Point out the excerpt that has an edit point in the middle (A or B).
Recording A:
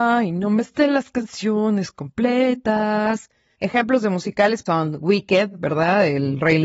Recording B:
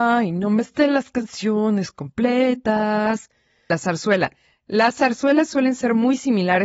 A